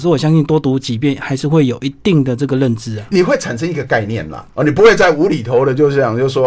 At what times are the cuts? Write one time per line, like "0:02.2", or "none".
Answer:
none